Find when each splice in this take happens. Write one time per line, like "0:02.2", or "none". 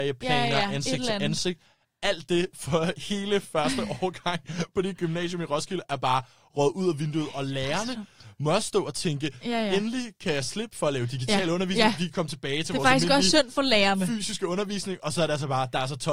none